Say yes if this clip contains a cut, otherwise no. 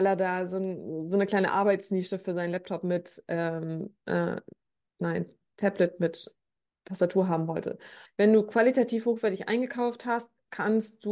yes